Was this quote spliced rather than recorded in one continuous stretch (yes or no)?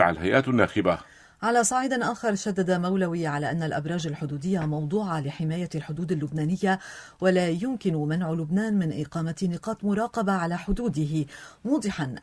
no